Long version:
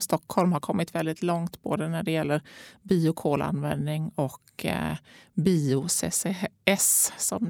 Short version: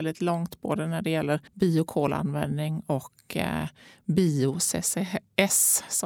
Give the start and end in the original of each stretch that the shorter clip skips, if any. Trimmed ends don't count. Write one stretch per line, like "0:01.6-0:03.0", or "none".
0:02.5-0:02.8

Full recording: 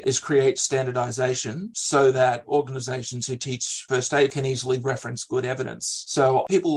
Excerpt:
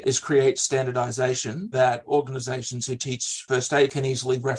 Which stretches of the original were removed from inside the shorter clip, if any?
0:01.7-0:02.1

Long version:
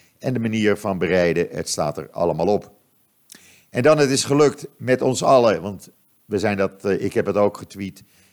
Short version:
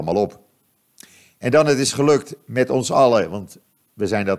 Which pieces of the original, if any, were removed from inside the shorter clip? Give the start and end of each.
none

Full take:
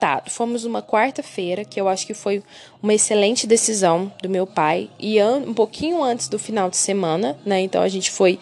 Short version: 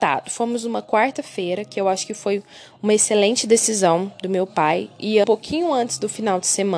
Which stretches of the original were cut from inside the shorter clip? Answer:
0:05.2-0:05.5

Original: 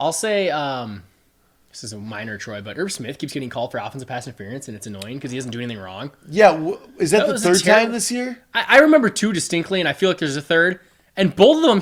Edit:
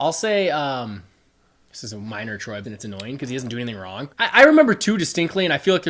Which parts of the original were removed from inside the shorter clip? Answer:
0:02.6-0:04.7
0:06.1-0:08.5

